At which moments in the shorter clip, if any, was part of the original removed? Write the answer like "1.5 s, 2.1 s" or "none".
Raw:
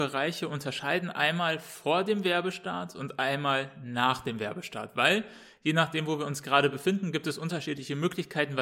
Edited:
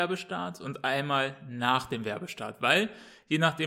none